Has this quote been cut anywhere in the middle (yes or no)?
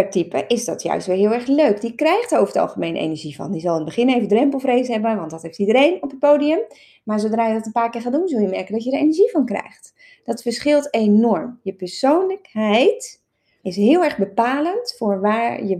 yes